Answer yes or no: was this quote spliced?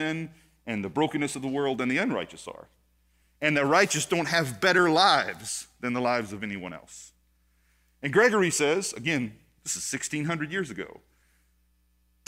no